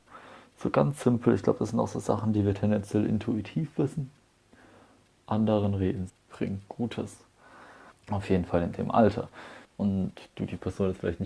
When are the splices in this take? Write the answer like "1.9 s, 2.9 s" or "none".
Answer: 6.1 s, 7.9 s, 9.6 s